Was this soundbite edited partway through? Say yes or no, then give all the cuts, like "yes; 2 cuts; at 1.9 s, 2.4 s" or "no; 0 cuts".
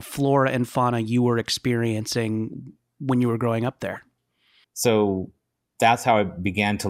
yes; 1 cut; at 4.6 s